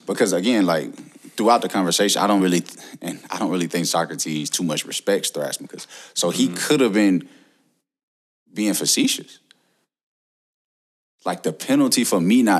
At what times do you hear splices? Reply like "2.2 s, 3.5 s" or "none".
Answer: none